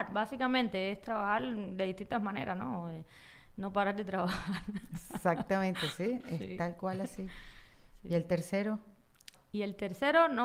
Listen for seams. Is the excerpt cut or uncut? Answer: uncut